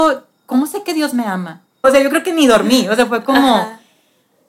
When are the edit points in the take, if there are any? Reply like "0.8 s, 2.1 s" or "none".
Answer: 1.8 s